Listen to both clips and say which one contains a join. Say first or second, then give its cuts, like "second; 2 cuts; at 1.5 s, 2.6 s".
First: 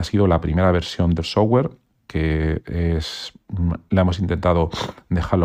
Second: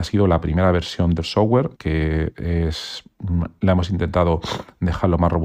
second; 1 cut; at 1.8 s